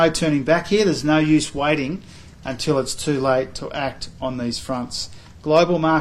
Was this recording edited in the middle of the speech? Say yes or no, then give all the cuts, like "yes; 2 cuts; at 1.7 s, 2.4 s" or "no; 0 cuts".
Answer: no; 0 cuts